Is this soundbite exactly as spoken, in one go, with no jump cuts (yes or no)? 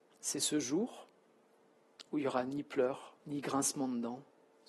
no